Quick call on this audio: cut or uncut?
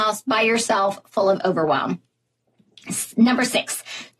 uncut